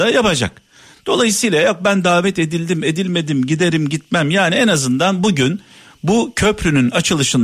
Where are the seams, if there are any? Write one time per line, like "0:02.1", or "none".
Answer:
none